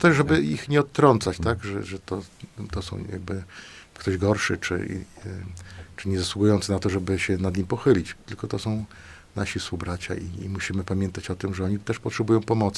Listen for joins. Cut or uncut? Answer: uncut